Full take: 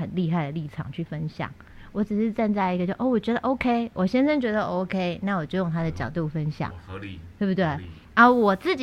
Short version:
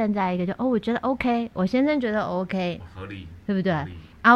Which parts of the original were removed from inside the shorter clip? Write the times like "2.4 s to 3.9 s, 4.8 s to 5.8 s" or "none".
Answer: 5.2 s to 6.7 s